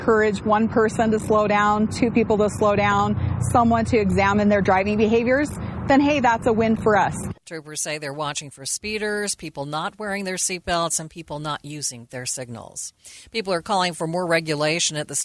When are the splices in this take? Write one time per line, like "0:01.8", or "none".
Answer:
none